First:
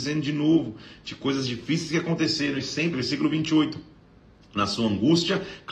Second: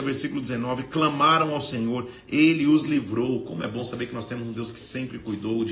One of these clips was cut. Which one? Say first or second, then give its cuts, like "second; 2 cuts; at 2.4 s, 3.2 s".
first; 1 cut; at 2.9 s